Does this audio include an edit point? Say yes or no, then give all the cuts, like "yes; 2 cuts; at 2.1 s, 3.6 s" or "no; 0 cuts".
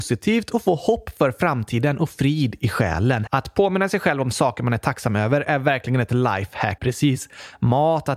yes; 2 cuts; at 3.3 s, 6.8 s